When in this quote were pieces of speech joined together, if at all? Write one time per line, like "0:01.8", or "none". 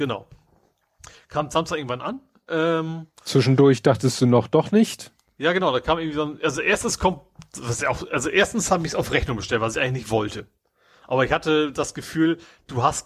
none

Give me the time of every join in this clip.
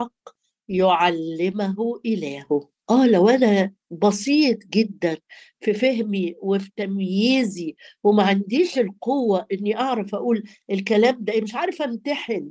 0:02.8

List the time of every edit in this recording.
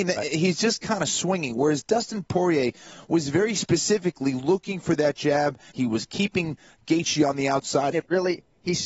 0:05.7
0:07.9

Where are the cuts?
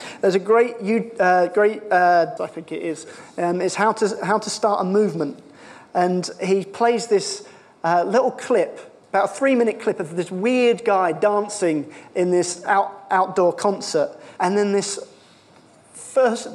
0:02.4
0:14.4

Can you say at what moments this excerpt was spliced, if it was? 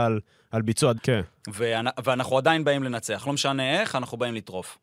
0:01.0

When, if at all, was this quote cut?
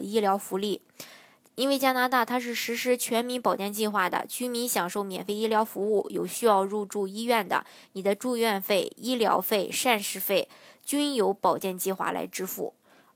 none

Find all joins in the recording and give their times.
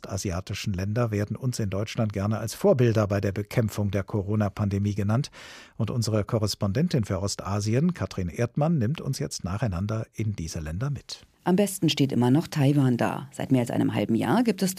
0:11.3

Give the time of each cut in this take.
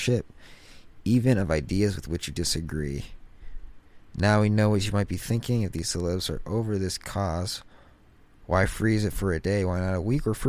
none

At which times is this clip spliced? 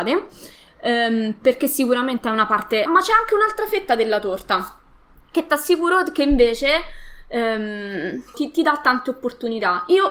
0:02.9
0:08.3

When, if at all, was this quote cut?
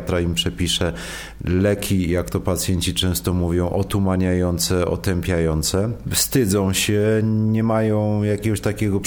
none

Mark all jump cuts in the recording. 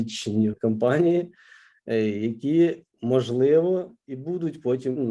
0:02.9

